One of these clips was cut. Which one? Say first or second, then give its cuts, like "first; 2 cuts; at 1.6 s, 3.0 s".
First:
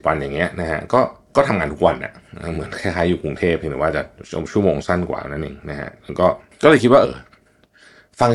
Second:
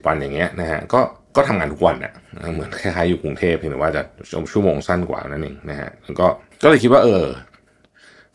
first; 1 cut; at 7.0 s